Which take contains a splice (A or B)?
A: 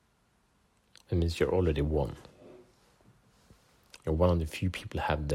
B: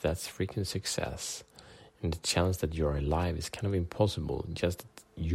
A